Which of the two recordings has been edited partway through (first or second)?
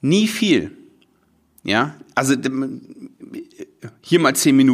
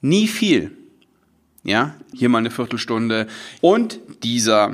second